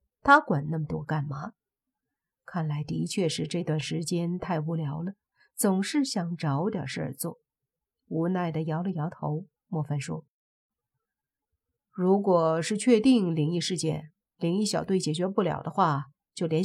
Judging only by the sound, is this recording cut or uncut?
uncut